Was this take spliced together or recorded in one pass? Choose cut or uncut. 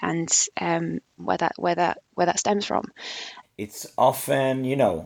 cut